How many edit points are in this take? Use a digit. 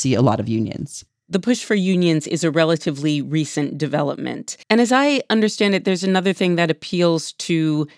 1